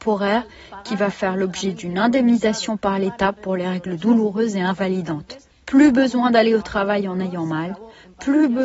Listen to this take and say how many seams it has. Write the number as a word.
zero